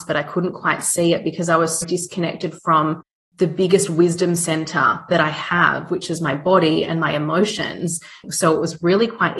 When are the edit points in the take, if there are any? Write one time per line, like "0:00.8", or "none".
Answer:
0:01.8
0:08.2